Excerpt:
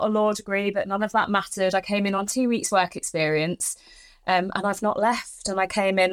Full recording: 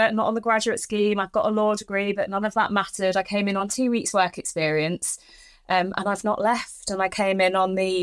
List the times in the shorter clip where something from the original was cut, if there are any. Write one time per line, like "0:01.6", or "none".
none